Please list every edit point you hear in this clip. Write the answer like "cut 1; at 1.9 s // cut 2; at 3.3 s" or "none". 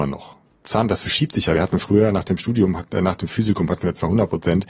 none